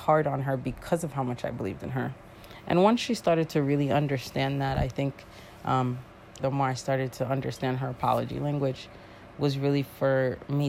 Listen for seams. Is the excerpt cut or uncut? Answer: cut